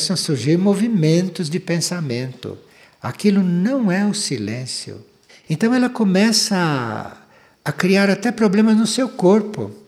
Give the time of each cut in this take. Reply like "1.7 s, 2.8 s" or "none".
5.3 s